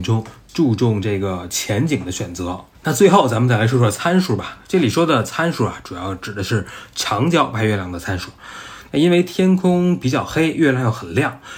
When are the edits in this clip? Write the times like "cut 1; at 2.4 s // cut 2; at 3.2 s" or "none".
none